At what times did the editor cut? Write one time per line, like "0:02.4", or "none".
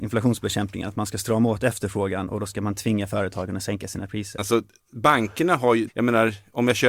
0:04.4
0:05.9